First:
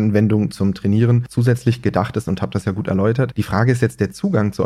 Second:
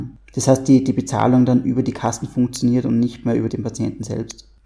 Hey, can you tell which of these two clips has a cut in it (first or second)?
second